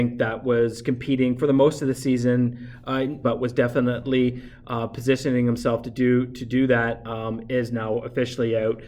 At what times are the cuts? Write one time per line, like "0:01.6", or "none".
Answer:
0:03.2